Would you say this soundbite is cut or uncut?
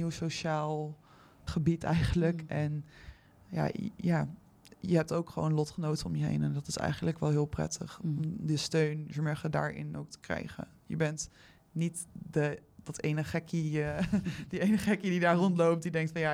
cut